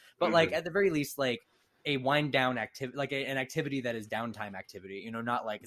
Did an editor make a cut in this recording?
no; 0 cuts

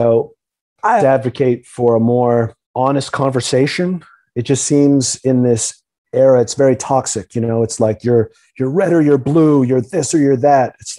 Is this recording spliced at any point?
yes; 2 cuts; at 1.0 s, 2.6 s

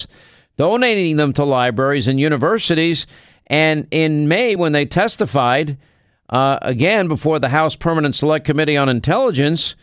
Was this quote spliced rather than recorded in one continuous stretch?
no; 0 cuts

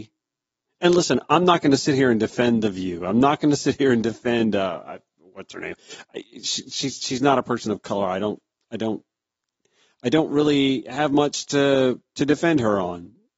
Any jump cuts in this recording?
no; 0 cuts

